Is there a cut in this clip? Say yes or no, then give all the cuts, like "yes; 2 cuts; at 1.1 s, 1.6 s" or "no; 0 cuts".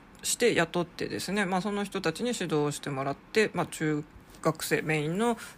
no; 0 cuts